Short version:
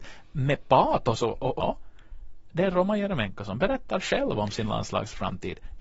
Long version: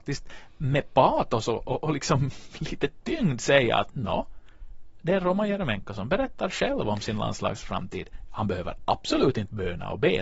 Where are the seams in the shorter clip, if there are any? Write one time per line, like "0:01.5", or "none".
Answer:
0:01.6